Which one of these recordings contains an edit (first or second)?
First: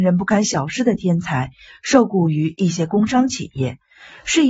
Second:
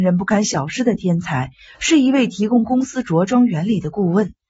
second